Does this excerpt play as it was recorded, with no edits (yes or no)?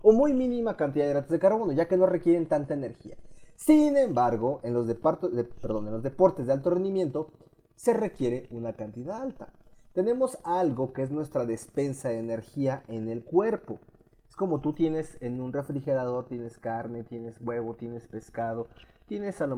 yes